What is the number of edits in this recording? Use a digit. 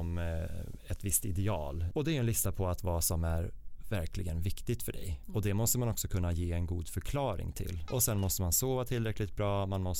2